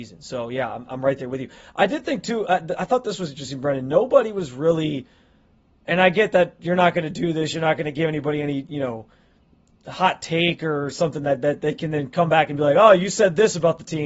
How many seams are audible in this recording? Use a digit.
0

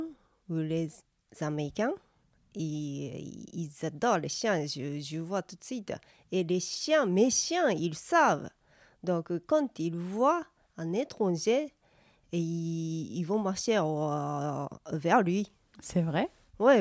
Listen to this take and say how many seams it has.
0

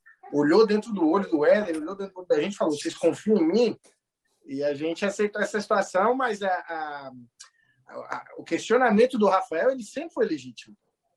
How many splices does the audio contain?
1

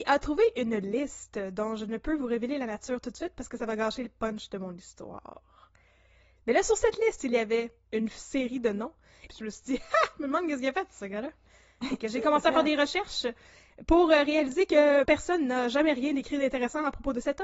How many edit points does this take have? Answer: 2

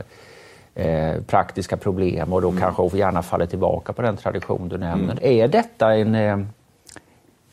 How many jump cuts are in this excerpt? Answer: 1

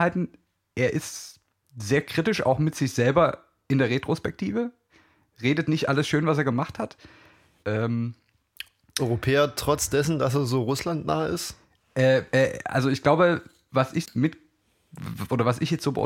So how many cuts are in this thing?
2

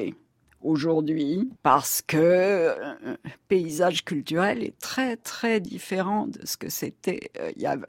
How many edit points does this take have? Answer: 1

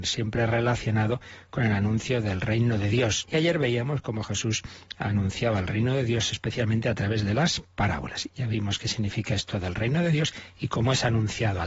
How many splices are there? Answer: 2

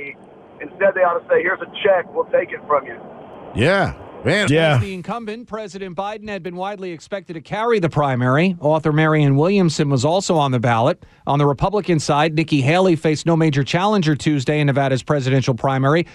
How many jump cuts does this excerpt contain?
1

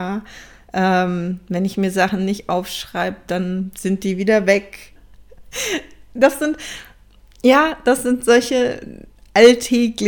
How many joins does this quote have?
1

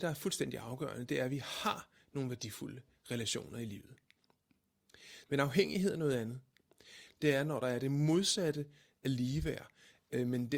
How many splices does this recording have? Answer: 2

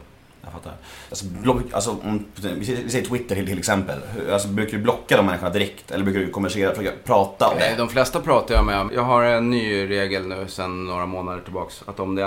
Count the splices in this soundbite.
3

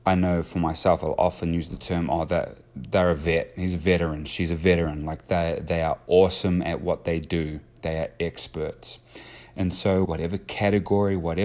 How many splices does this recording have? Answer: 1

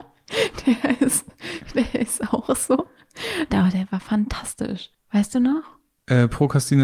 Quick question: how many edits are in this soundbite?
1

